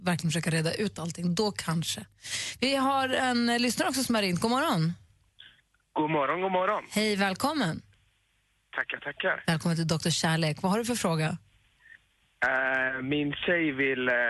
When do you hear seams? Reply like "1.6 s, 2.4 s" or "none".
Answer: none